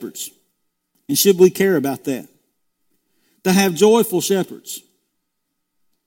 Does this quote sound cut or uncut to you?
uncut